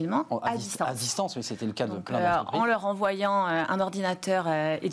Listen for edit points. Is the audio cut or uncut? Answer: uncut